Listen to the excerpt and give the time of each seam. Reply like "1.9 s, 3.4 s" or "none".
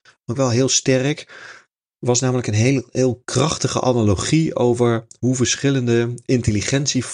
none